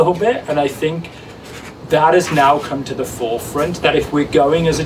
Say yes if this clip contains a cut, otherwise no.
no